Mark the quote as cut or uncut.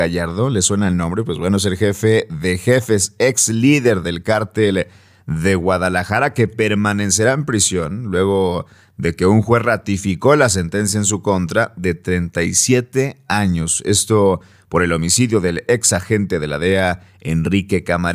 uncut